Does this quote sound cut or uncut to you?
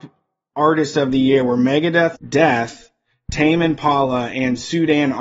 cut